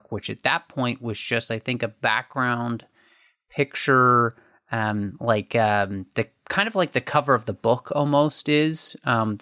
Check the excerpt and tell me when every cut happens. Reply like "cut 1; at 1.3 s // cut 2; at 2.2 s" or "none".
none